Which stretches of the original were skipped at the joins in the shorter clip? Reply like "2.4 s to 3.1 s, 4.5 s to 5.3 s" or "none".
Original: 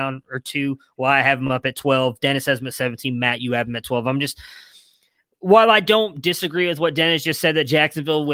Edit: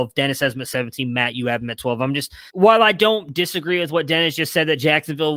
4.5 s to 5.4 s